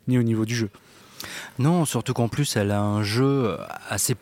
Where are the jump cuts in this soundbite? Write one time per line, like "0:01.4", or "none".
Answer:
none